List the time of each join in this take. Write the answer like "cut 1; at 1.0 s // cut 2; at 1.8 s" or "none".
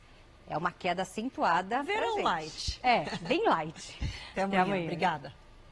none